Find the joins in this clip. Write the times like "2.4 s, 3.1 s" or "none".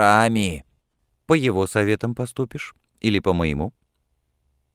1.1 s